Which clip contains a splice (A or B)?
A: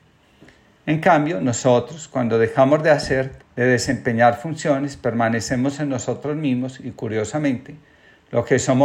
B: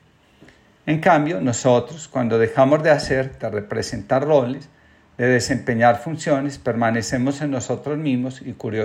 A